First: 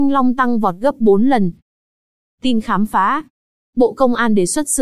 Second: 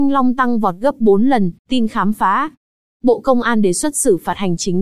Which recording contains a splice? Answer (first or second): second